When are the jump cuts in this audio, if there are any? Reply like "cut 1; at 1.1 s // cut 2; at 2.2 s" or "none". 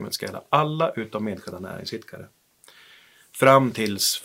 none